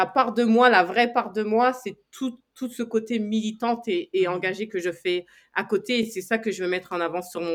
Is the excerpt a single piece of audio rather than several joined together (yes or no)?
yes